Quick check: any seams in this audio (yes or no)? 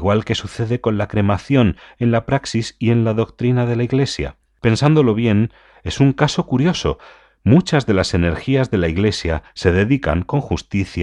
yes